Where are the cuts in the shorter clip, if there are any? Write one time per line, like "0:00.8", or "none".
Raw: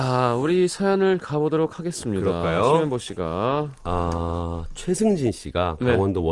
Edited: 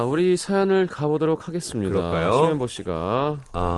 none